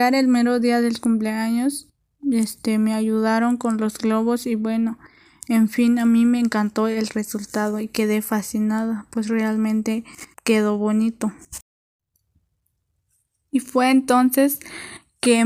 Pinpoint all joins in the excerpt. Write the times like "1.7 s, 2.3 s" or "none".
10.3 s